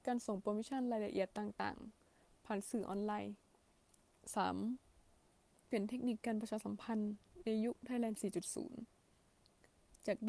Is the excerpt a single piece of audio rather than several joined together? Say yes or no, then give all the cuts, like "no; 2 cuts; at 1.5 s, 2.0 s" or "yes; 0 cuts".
no; 1 cut; at 5.6 s